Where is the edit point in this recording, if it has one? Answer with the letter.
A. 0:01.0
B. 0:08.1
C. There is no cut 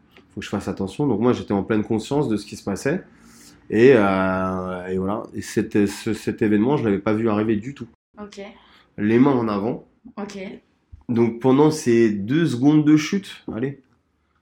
B